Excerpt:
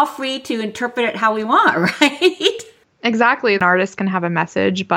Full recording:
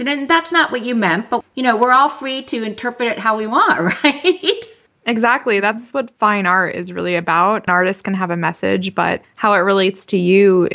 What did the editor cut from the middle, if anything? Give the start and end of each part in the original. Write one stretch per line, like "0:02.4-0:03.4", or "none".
0:05.6-0:07.6